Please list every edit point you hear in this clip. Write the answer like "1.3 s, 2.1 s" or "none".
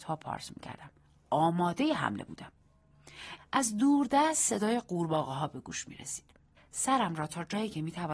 3.4 s, 6.6 s